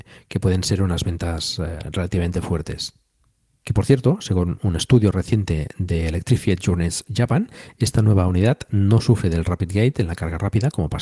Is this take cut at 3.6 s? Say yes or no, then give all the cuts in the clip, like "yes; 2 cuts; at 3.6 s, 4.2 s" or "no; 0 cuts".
yes; 1 cut; at 3.6 s